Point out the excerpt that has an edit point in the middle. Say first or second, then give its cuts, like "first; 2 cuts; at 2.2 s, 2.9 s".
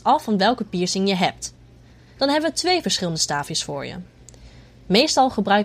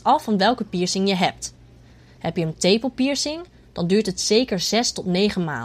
first; 1 cut; at 2.2 s